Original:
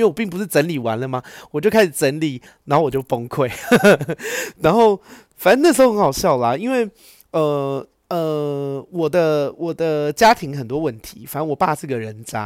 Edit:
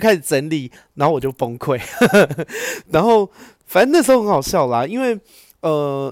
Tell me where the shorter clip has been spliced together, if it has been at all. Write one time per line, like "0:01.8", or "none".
none